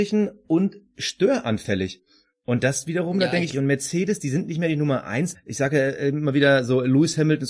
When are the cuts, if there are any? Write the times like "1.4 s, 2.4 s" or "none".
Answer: 3.5 s, 5.3 s